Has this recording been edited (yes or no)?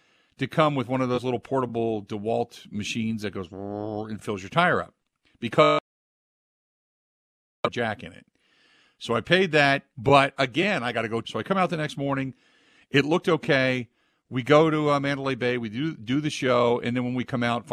yes